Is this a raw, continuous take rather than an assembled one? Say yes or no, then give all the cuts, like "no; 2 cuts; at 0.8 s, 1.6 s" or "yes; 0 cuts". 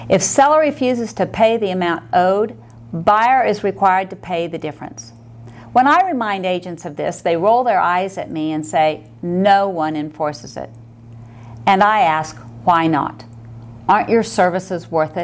yes; 0 cuts